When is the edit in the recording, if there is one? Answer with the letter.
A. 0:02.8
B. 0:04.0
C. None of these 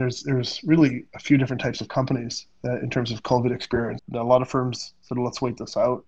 B